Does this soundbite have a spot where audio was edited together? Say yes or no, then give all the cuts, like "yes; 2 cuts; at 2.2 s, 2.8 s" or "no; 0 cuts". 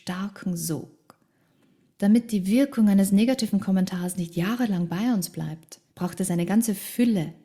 yes; 2 cuts; at 1.9 s, 5.9 s